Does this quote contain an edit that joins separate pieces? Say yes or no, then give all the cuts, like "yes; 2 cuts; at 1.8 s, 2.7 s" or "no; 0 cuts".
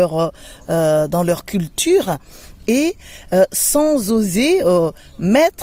no; 0 cuts